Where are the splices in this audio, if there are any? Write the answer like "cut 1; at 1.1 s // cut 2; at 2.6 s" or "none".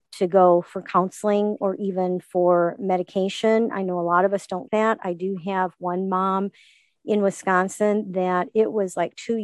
cut 1; at 4.7 s